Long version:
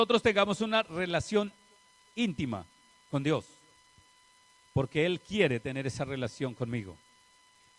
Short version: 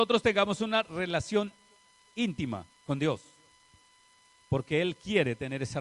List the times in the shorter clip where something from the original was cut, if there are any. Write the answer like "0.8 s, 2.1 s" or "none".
2.8 s